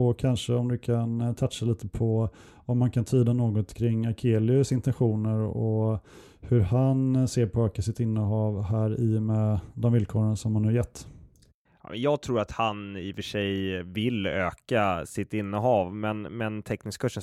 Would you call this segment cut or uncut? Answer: uncut